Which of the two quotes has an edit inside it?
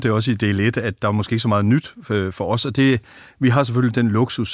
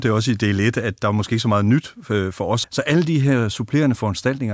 second; 1 cut; at 2.6 s

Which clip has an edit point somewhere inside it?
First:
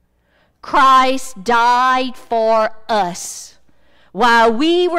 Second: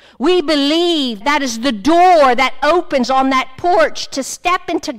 second; 1 cut; at 1.2 s

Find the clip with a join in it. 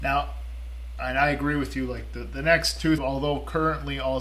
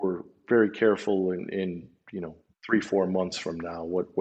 first; 2 cuts; at 1.0 s, 3.0 s

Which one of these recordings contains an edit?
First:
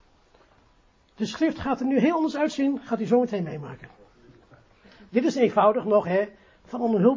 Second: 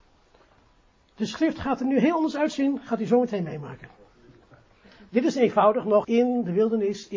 second; 1 cut; at 6.0 s

